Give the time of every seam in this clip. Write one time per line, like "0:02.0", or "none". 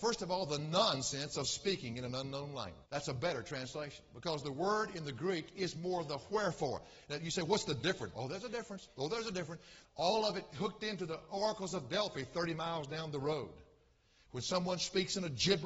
0:02.8
0:08.1
0:09.8